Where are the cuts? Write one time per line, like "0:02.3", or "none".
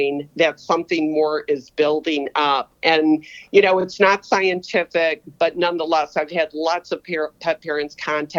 none